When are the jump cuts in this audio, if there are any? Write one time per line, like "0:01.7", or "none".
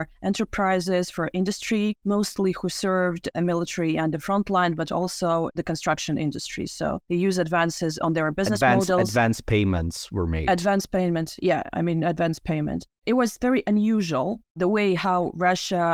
none